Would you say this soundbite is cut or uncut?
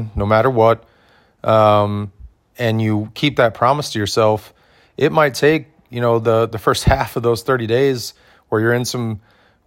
uncut